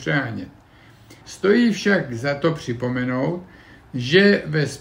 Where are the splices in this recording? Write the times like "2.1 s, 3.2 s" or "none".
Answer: 1.2 s